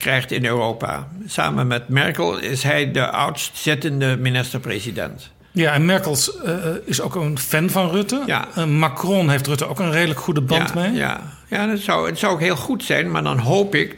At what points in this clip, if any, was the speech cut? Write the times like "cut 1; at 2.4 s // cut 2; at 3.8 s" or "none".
none